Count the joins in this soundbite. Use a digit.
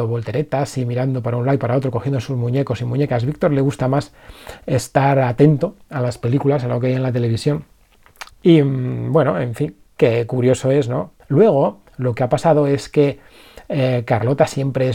2